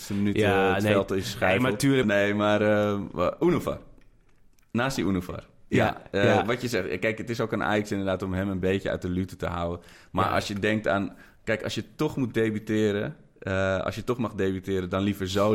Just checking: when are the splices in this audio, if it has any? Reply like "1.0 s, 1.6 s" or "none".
2.0 s